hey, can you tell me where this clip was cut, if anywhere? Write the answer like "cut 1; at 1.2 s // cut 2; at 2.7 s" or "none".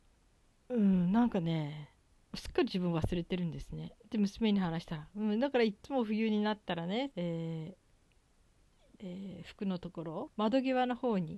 cut 1; at 7.1 s // cut 2; at 8.9 s // cut 3; at 10.3 s